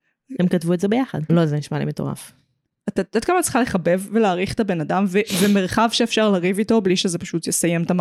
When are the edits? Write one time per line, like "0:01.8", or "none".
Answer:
0:01.3